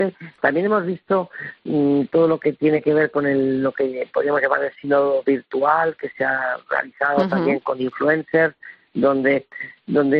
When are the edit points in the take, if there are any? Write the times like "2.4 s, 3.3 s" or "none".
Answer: 7.6 s